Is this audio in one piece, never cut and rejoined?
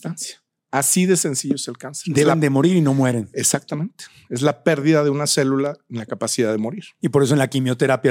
yes; 0 cuts

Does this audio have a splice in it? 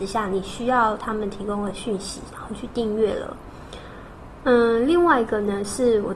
yes; 1 cut; at 4.4 s

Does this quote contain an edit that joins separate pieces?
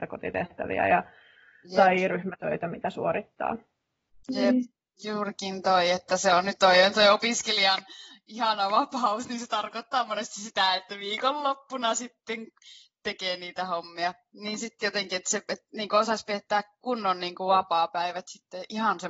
yes; 1 cut; at 6.6 s

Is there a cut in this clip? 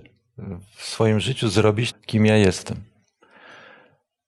yes; 1 cut; at 1.9 s

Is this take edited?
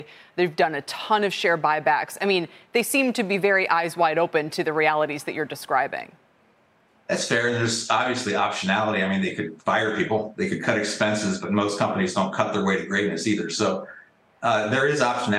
no; 0 cuts

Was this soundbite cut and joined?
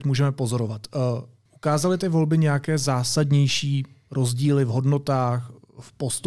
yes; 1 cut; at 1.5 s

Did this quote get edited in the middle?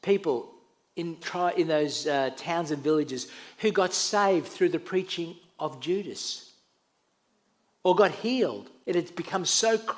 yes; 2 cuts; at 1.2 s, 8.8 s

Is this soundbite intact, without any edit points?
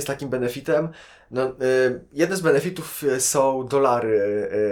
yes; 0 cuts

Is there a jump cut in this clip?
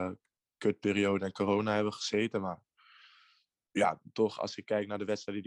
no; 0 cuts

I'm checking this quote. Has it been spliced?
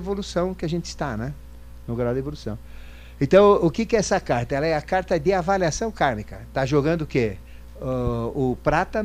no; 0 cuts

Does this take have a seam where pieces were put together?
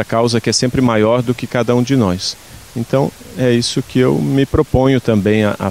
no; 0 cuts

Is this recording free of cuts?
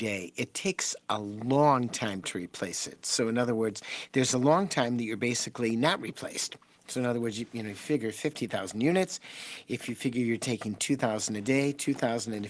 yes; 0 cuts

